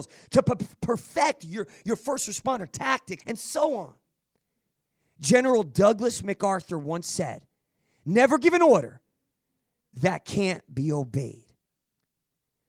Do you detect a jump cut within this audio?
yes; 1 cut; at 3.2 s

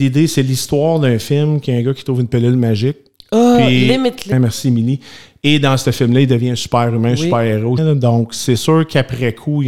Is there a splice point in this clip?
yes; 2 cuts; at 4.3 s, 7.8 s

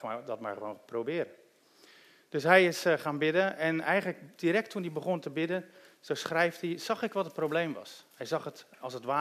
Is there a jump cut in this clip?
no; 0 cuts

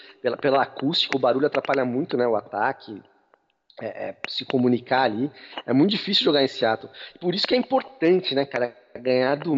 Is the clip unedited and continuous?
yes; 0 cuts

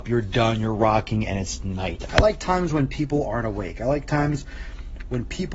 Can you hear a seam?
yes; 1 cut; at 2.1 s

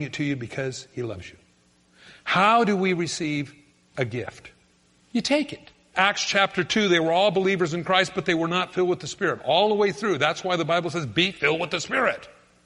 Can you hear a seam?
yes; 1 cut; at 5.9 s

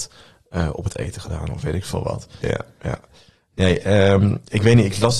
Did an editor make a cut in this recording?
yes; 1 cut; at 2.4 s

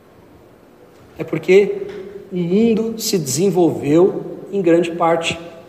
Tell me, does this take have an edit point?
no; 0 cuts

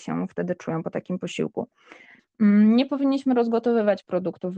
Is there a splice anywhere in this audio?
yes; 1 cut; at 2.2 s

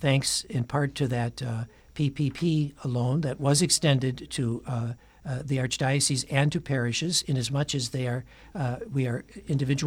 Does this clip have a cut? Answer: no; 0 cuts

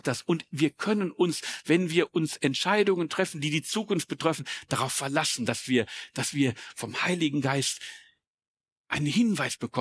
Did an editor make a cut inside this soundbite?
no; 0 cuts

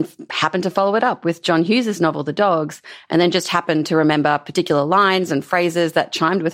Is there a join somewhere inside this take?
no; 0 cuts

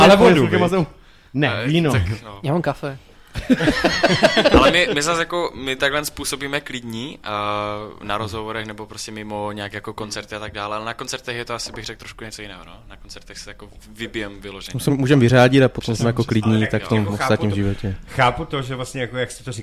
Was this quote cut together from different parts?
yes; 1 cut; at 14.9 s

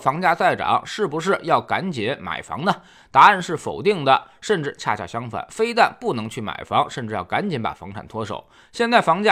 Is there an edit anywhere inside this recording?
no; 0 cuts

